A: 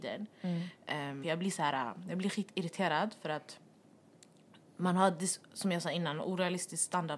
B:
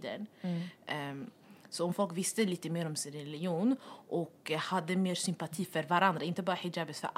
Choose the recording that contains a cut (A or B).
A